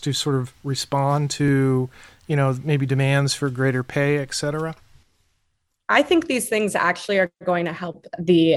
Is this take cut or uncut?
uncut